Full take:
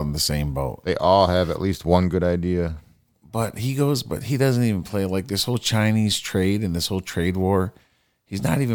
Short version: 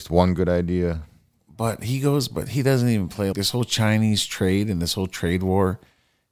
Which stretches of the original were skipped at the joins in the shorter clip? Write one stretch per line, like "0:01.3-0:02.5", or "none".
0:05.1-0:05.3